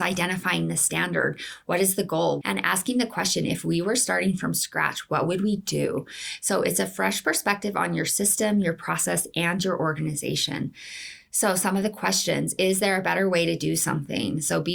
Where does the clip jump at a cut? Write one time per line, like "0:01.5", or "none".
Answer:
0:02.4